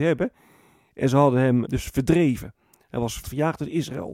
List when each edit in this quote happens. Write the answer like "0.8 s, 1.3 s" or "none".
1.6 s, 3.2 s